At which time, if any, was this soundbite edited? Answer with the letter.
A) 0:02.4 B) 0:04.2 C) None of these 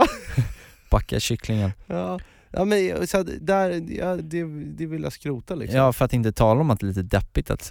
B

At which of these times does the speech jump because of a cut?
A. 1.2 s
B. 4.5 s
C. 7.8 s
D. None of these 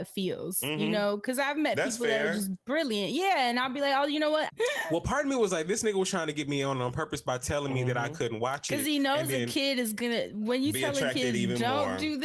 B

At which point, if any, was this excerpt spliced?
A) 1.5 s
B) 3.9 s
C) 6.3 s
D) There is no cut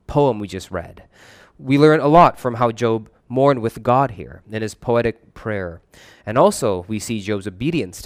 D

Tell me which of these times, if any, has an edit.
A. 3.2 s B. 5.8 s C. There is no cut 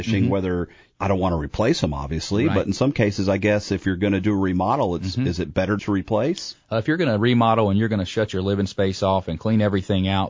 B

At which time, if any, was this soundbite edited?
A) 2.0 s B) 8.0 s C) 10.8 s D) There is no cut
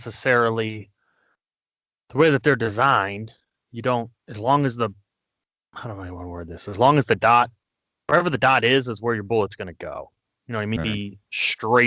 C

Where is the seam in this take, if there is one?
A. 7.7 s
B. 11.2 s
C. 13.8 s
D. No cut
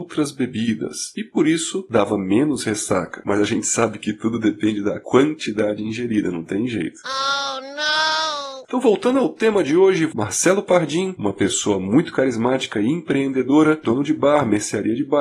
C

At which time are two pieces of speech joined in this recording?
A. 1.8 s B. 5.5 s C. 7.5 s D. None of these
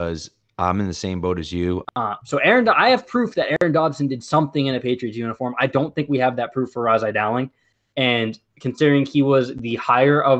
A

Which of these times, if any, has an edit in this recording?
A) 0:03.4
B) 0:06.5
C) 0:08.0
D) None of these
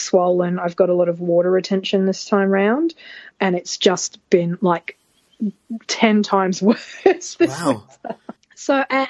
A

